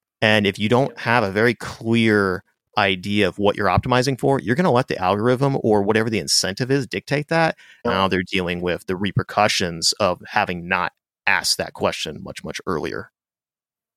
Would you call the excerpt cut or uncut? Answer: cut